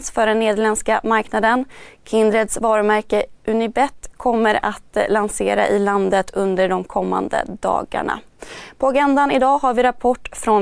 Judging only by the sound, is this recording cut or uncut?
uncut